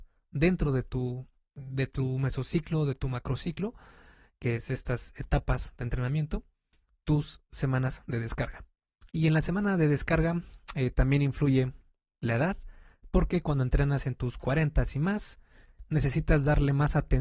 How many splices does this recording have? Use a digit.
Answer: 1